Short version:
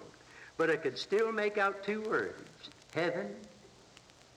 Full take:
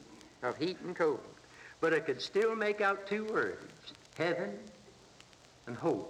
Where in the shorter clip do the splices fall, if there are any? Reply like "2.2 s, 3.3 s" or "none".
none